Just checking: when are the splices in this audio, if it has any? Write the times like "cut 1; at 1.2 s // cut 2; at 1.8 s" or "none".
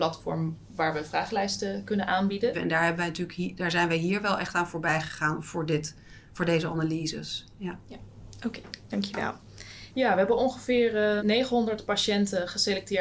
cut 1; at 2.5 s // cut 2; at 9.9 s // cut 3; at 11.2 s